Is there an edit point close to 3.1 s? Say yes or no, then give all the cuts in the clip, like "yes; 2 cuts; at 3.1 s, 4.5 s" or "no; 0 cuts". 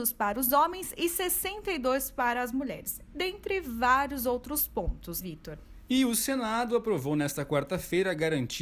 no; 1 cut; at 5.2 s